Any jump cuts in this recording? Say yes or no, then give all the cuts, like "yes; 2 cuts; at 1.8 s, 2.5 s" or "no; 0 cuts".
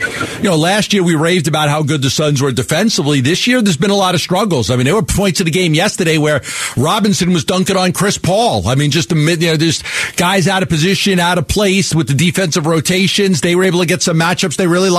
no; 0 cuts